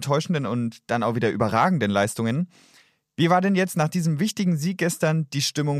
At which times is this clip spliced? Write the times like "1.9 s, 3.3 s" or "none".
none